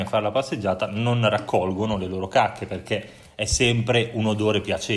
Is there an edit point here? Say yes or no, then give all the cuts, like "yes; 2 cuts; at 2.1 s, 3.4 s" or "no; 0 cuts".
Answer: no; 0 cuts